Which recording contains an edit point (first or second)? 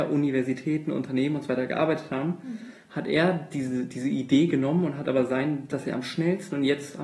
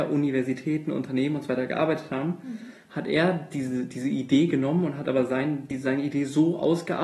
first